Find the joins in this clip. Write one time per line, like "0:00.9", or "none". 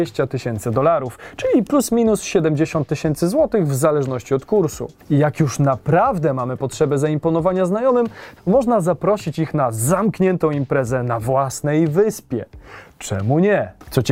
0:08.4